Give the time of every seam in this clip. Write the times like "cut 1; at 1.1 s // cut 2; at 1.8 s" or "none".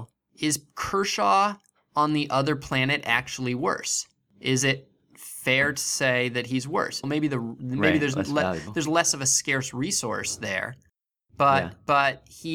cut 1; at 7.0 s